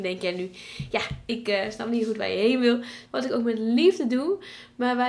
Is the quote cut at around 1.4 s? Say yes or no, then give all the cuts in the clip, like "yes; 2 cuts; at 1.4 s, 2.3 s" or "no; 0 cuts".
no; 1 cut; at 3.1 s